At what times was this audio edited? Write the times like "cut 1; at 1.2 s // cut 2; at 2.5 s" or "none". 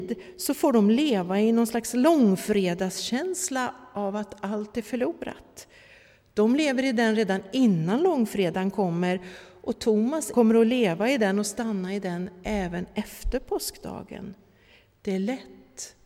cut 1; at 10.3 s